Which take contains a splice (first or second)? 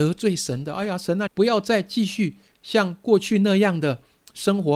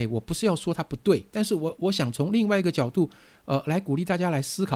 first